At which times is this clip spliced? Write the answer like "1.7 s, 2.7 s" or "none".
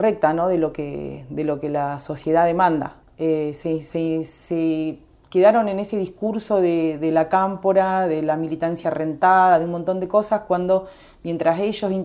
3.0 s